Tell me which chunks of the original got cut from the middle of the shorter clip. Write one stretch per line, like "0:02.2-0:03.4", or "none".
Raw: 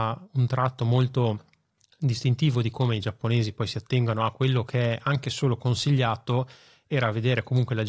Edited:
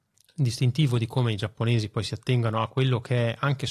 none